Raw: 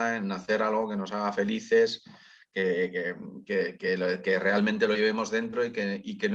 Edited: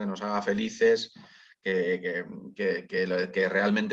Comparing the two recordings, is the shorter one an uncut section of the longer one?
yes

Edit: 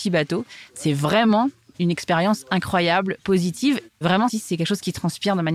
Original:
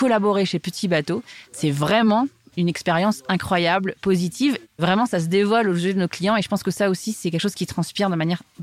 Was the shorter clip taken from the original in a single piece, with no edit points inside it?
no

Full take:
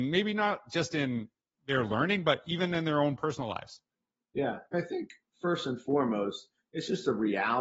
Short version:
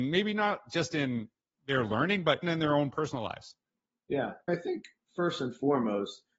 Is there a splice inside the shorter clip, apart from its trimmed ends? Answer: yes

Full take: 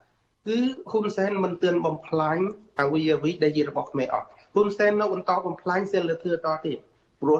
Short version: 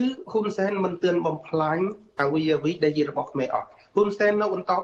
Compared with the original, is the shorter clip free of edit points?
yes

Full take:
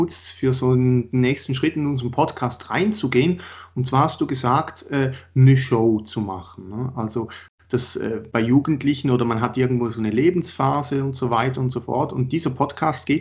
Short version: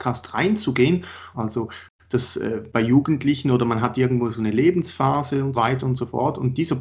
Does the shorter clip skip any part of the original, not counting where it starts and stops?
yes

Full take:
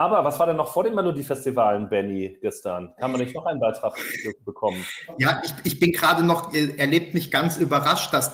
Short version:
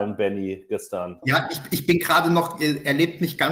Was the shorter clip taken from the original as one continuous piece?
no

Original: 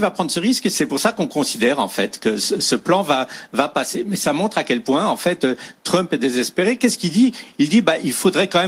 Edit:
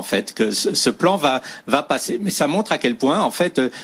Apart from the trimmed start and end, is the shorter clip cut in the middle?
no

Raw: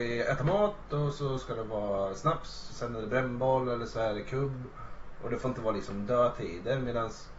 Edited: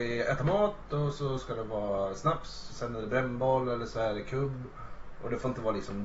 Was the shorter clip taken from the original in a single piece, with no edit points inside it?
yes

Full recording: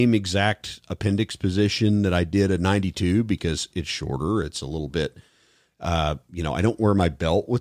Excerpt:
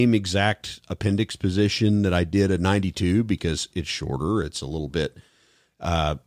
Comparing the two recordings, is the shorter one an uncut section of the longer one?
yes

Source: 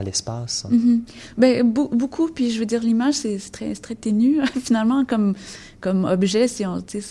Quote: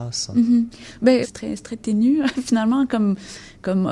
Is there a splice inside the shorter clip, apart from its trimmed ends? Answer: yes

